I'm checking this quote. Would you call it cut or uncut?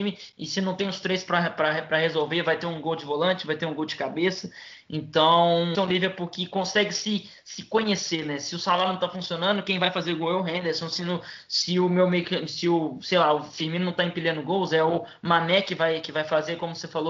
cut